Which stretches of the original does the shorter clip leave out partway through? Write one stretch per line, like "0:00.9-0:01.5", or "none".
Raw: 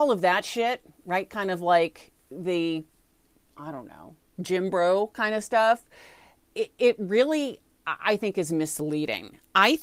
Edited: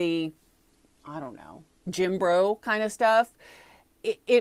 none